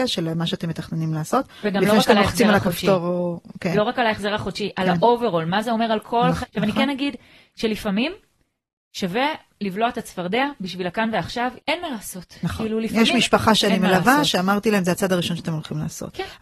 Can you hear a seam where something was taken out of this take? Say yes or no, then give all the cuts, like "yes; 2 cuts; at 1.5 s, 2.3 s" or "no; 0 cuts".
yes; 2 cuts; at 6.4 s, 11.6 s